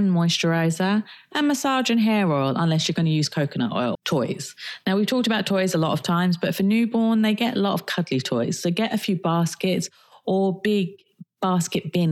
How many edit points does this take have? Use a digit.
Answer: 1